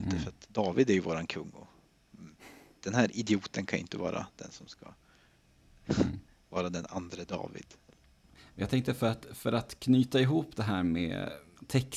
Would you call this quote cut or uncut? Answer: uncut